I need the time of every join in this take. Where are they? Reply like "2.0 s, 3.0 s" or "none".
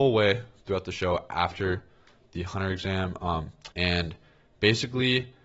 3.7 s